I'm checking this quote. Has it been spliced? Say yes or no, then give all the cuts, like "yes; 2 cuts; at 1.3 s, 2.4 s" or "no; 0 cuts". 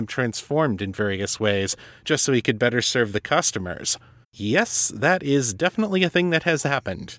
yes; 1 cut; at 4.2 s